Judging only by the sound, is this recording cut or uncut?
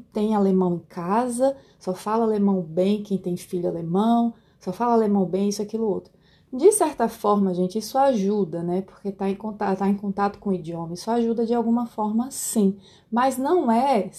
uncut